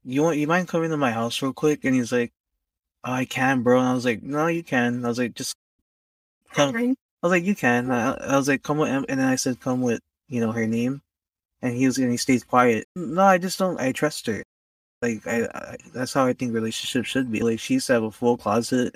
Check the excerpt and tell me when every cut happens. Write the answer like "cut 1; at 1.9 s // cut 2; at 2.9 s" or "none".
cut 1; at 12.8 s